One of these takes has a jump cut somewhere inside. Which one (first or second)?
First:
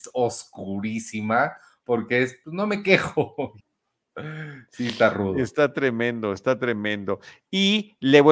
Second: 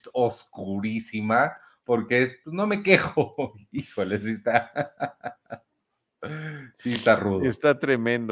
first